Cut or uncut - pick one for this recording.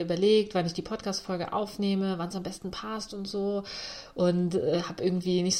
uncut